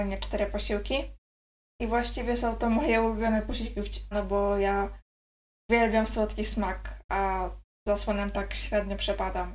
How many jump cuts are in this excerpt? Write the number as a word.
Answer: one